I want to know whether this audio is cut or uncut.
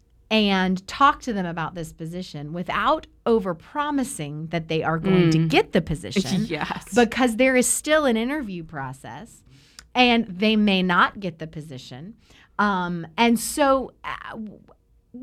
uncut